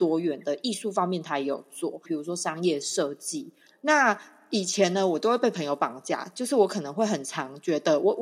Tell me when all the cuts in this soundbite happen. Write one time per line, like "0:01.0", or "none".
0:02.0
0:03.7